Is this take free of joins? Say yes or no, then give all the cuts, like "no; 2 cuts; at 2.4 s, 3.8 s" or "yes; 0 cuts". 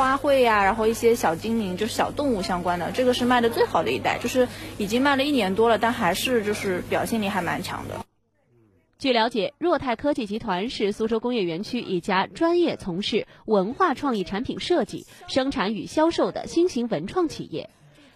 yes; 0 cuts